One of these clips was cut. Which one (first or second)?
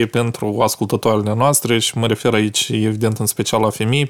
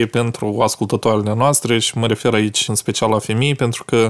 second